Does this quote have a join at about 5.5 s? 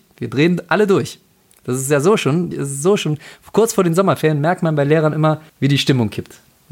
yes; 2 cuts; at 2.5 s, 5.5 s

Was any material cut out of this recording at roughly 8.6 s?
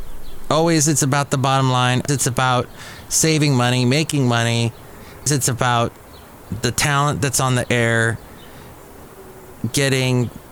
no; 2 cuts; at 2.1 s, 5.3 s

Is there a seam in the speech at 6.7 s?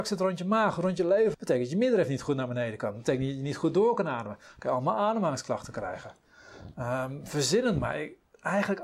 no; 1 cut; at 1.3 s

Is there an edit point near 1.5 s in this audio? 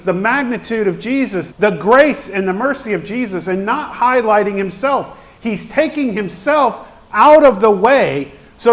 yes; 1 cut; at 1.5 s

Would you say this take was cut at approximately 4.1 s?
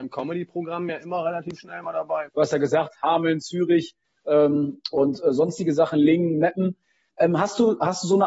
no; 1 cut; at 2.3 s

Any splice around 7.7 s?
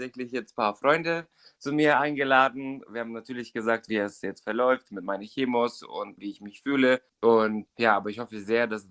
yes; 2 cuts; at 3.9 s, 7.7 s

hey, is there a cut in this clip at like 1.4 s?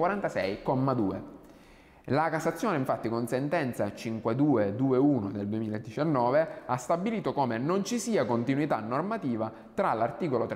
no; 0 cuts

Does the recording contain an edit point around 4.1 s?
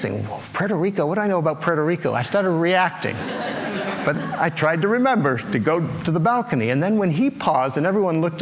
yes; 1 cut; at 4.1 s

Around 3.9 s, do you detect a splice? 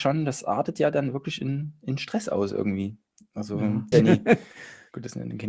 yes; 1 cut; at 3.9 s

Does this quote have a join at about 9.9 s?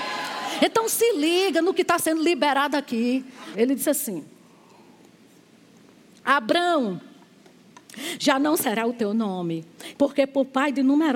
yes; 2 cuts; at 3.5 s, 9.9 s

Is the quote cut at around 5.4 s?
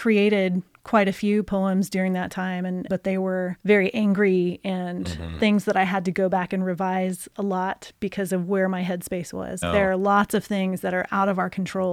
no; 2 cuts; at 2.9 s, 9.6 s

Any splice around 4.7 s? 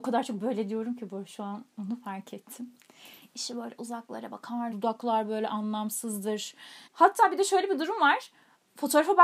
yes; 2 cuts; at 4.7 s, 6.8 s

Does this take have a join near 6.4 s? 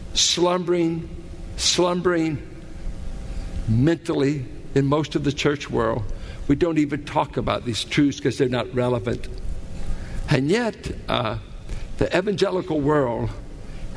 no; 1 cut; at 10.2 s

